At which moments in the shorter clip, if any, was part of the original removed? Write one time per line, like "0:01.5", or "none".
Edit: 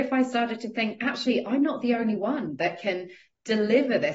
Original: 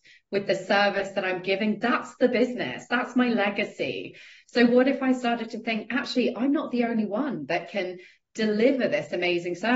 none

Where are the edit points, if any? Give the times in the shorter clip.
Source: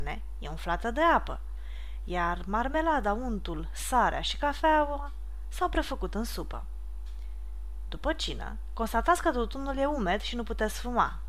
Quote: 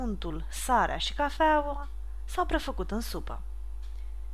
none

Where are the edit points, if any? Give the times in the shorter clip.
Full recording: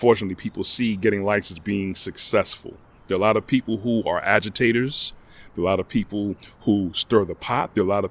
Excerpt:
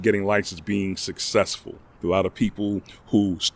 0:02.0

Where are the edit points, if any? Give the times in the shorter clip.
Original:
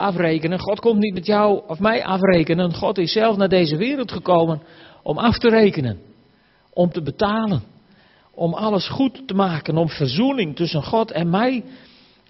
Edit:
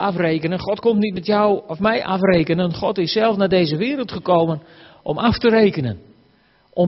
none

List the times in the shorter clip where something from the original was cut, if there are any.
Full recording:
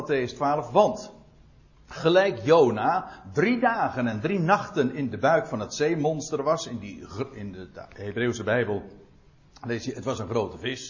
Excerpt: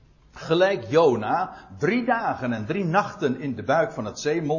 none

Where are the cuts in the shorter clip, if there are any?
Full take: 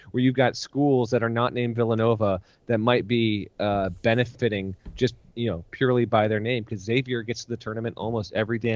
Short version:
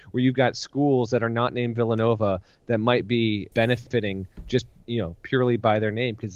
0:03.5

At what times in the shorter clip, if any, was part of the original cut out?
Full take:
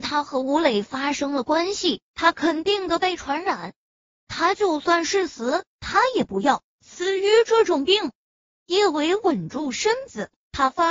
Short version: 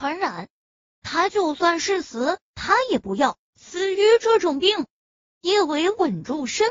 none

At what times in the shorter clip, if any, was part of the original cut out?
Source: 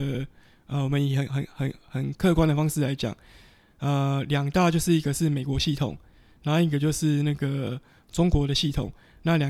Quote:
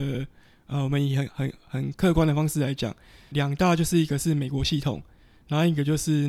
0:01.3
0:03.3

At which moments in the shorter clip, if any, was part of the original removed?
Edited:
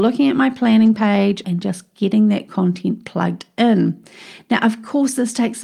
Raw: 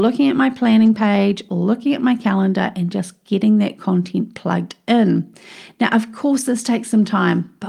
0:01.4

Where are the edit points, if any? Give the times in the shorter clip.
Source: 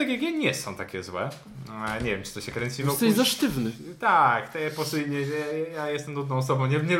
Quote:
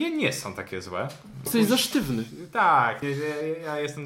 0:01.5
0:03.0

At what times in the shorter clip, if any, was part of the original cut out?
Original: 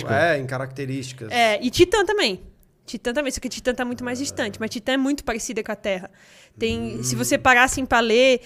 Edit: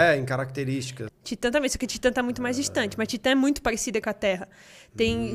0:01.1

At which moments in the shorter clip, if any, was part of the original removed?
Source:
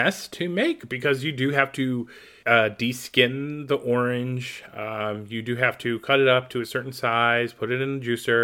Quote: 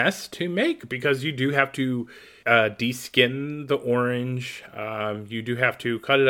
none

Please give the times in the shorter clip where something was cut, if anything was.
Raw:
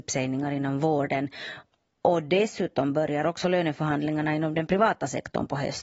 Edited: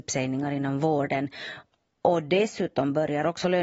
none

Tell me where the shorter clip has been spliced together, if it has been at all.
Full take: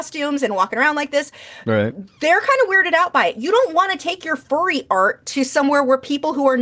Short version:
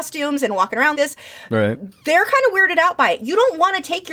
0:00.9

